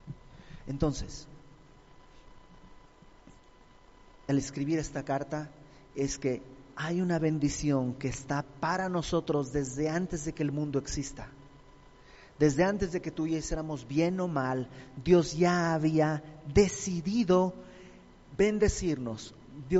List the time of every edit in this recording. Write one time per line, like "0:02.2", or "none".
0:04.3